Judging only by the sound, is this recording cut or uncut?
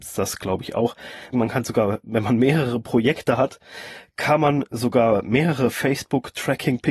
cut